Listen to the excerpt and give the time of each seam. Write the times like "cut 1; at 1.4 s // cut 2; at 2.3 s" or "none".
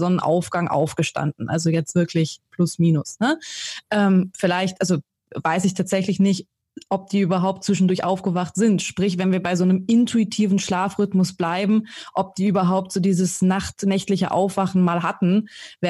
none